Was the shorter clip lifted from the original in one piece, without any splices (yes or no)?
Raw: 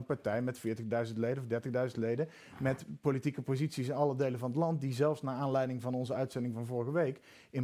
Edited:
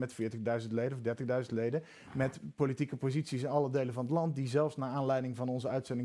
yes